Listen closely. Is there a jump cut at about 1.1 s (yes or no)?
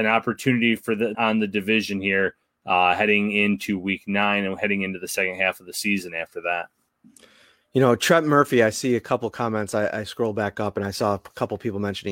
yes